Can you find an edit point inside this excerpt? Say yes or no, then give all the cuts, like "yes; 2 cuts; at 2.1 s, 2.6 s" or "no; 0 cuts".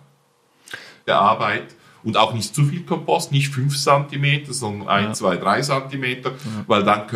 yes; 1 cut; at 1.1 s